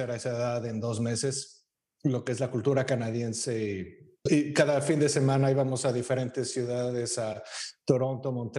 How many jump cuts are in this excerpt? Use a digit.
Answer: 0